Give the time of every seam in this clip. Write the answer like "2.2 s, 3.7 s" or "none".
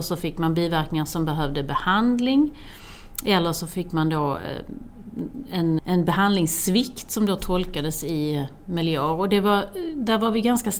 5.8 s